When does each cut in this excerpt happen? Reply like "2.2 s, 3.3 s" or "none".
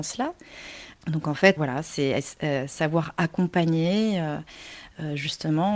1.6 s